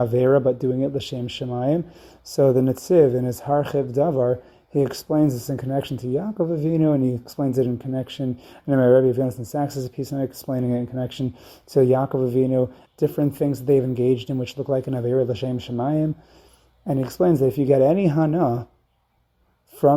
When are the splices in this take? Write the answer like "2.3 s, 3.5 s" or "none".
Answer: 12.9 s